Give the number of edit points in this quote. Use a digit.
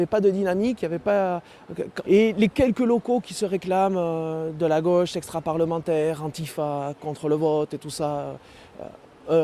1